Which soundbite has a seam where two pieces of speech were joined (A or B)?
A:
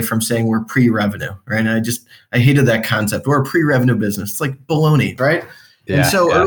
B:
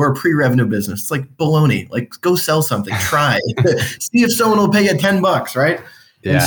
A